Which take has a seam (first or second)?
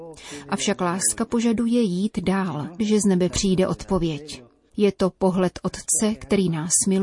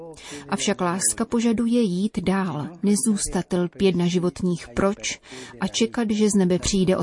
first